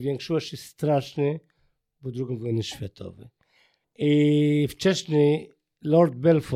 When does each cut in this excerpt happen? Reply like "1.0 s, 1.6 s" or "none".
3.8 s